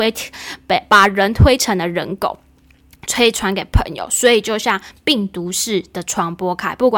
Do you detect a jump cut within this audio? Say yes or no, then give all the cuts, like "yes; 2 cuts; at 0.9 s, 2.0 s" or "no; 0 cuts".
yes; 1 cut; at 3.1 s